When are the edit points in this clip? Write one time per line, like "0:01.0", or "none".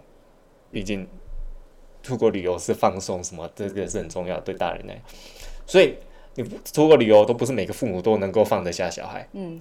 0:07.3